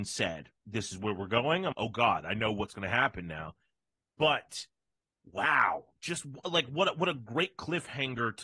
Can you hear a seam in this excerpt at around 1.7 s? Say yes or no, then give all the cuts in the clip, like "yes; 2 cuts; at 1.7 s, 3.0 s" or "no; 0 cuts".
yes; 1 cut; at 1.7 s